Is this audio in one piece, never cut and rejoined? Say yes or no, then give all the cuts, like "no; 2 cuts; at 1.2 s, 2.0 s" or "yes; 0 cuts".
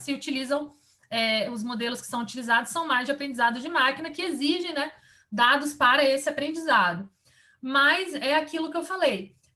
yes; 0 cuts